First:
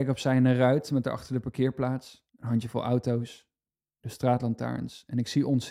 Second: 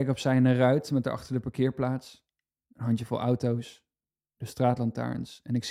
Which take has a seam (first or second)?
first